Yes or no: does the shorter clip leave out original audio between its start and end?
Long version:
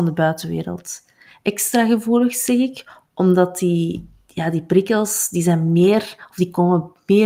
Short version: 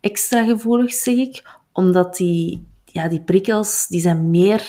no